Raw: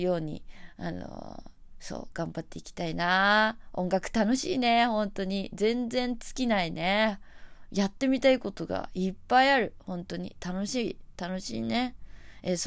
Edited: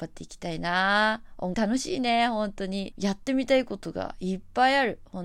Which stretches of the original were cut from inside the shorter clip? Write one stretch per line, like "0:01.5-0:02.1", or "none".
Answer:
0:03.9-0:04.1
0:05.5-0:07.7